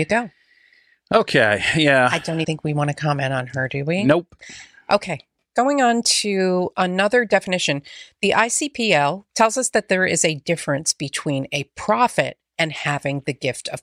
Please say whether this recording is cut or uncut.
cut